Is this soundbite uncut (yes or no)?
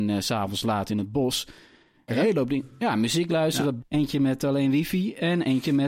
no